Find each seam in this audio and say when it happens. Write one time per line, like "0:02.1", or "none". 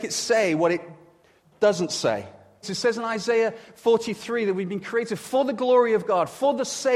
0:02.6